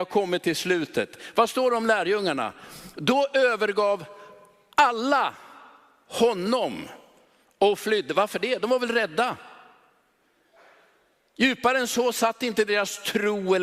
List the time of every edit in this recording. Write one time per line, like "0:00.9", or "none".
none